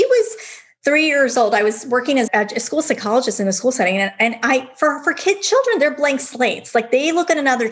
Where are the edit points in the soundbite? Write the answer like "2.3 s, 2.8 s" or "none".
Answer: 2.3 s